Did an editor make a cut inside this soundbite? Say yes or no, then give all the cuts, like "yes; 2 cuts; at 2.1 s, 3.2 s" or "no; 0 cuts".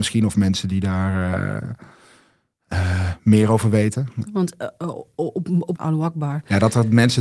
yes; 2 cuts; at 4.3 s, 5.8 s